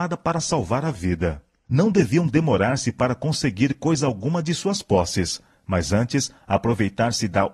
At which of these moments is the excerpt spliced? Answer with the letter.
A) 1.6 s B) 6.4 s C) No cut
A